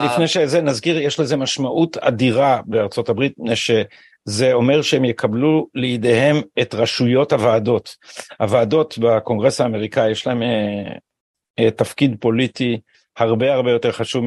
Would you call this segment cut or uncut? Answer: uncut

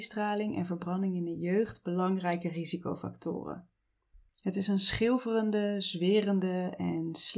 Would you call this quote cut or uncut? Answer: cut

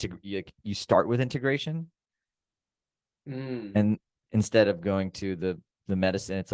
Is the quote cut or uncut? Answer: uncut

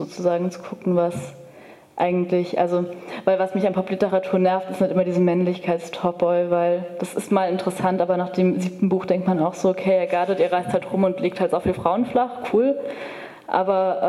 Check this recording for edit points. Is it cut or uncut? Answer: uncut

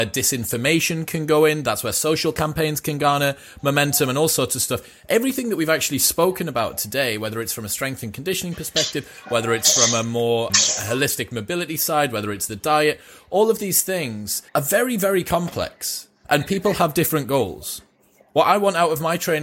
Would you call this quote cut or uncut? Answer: cut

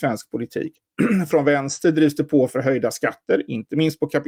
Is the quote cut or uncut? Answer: uncut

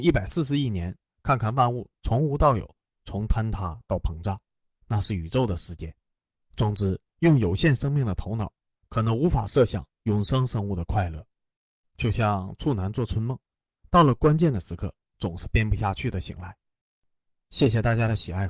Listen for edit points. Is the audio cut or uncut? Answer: uncut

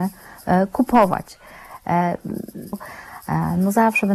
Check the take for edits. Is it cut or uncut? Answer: cut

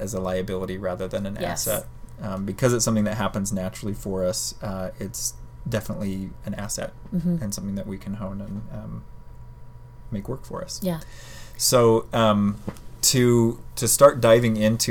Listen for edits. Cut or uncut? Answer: uncut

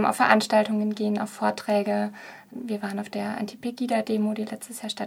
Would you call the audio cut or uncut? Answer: cut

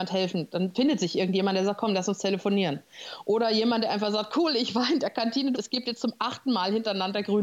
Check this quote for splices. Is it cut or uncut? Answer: cut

